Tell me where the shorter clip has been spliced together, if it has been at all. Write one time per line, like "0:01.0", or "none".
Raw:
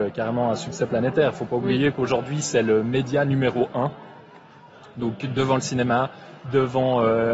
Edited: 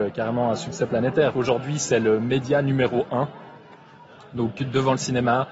0:01.3